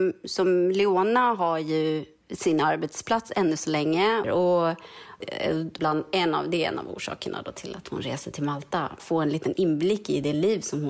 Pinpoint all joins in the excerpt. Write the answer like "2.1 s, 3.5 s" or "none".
4.2 s, 5.8 s, 9.0 s

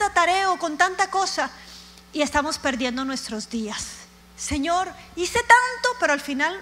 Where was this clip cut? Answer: 4.2 s

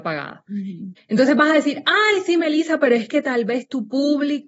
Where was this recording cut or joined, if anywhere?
1.0 s

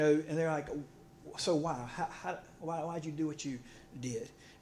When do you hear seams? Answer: none

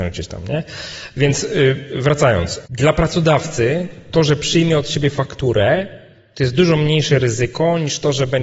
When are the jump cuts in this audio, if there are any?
none

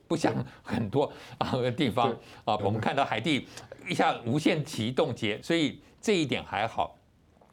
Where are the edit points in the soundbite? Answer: 2.6 s, 5.4 s

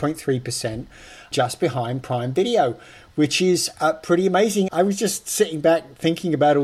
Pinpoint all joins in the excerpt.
4.7 s

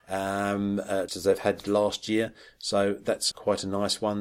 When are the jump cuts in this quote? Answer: 1.1 s, 3.3 s

